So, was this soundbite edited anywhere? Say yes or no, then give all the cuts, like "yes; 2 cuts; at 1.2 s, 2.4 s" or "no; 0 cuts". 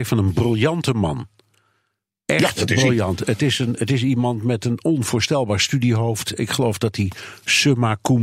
no; 0 cuts